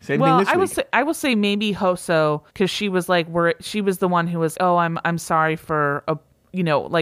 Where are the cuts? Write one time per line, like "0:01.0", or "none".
0:00.9
0:02.5
0:04.5